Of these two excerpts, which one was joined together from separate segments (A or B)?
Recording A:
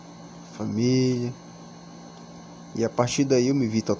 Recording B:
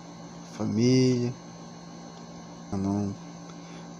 B